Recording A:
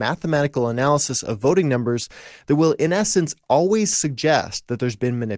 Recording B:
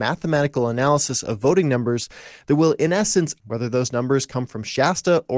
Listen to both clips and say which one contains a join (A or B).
B